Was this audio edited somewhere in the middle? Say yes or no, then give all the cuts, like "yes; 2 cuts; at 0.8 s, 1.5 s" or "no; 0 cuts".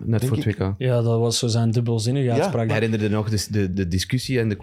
yes; 2 cuts; at 2.7 s, 3.7 s